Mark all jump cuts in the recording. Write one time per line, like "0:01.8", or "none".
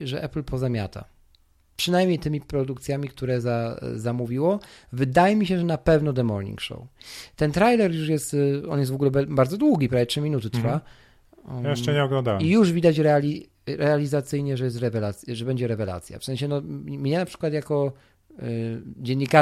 none